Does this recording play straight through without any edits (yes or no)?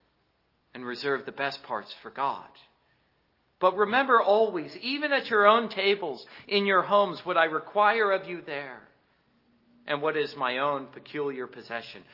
yes